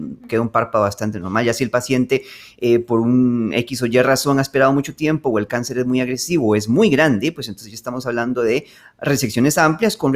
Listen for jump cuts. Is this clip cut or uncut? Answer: uncut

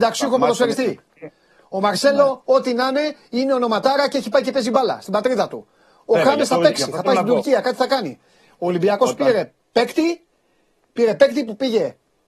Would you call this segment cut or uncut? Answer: uncut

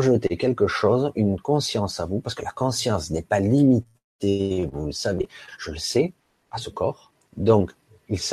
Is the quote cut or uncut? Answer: cut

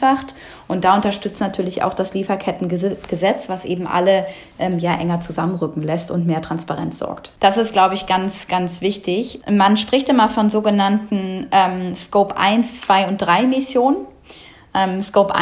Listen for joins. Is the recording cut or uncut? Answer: cut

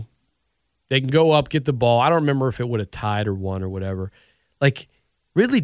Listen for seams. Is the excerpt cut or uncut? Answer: uncut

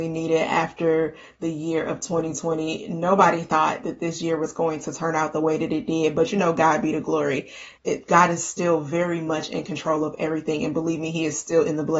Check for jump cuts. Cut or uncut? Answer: uncut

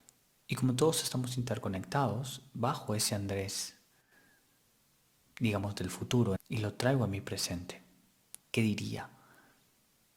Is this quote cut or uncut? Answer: cut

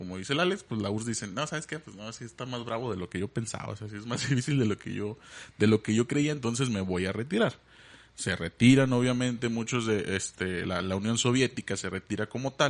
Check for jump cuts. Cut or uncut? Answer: uncut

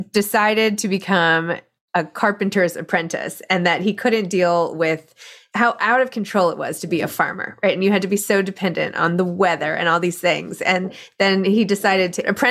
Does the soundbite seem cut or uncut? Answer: uncut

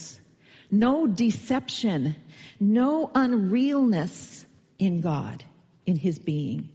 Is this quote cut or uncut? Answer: uncut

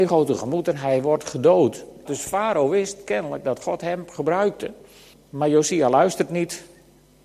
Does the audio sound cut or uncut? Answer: cut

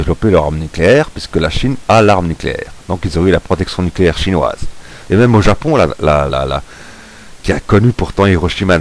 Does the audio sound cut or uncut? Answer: cut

